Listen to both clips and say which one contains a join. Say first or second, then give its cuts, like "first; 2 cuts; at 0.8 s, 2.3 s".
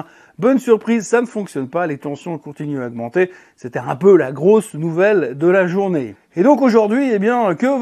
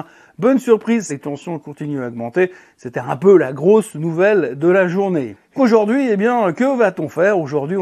second; 2 cuts; at 1.1 s, 5.6 s